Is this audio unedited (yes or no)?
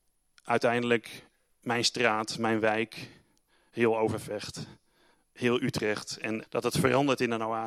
no